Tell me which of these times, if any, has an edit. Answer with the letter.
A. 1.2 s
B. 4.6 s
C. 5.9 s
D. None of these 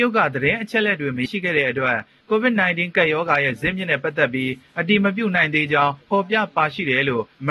A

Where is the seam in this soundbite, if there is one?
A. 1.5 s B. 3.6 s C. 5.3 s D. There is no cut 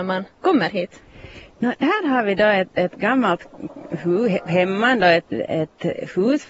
C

